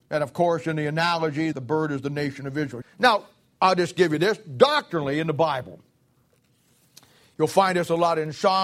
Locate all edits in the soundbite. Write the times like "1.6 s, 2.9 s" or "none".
1.5 s, 2.8 s